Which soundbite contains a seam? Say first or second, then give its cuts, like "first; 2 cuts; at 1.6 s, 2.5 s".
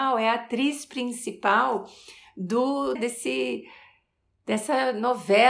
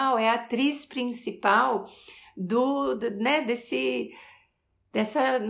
first; 1 cut; at 3.0 s